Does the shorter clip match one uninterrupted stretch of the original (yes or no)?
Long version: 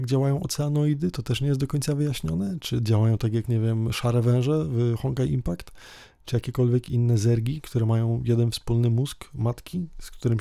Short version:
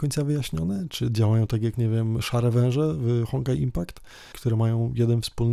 no